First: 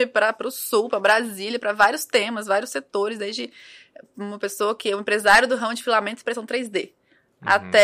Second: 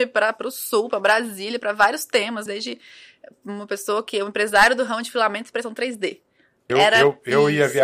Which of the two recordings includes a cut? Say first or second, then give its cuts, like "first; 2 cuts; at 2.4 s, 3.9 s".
second; 2 cuts; at 2.5 s, 6.7 s